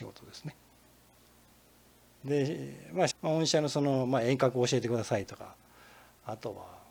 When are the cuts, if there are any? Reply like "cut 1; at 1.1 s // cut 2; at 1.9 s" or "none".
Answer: cut 1; at 2.1 s // cut 2; at 3.1 s